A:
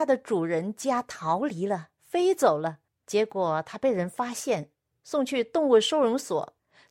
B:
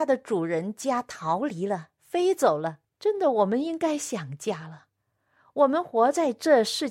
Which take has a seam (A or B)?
B